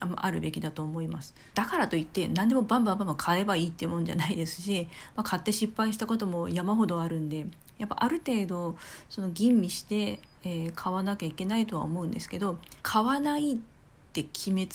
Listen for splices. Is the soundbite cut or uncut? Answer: cut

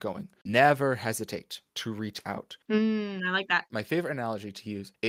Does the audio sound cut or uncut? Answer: cut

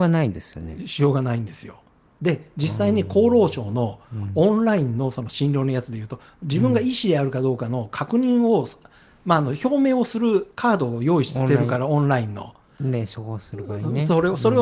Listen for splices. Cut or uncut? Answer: uncut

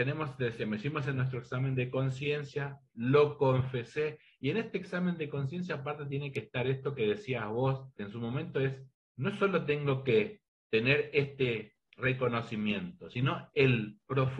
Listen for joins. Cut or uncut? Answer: uncut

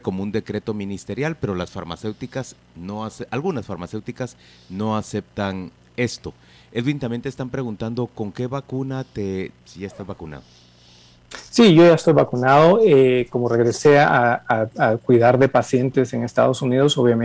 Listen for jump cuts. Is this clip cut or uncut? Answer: cut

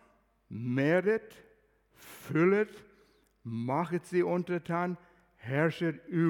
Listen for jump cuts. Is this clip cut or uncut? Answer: uncut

